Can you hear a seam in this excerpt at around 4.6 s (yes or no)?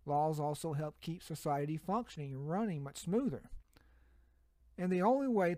yes